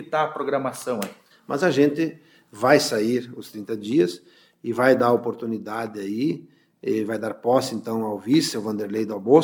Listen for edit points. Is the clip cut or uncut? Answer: cut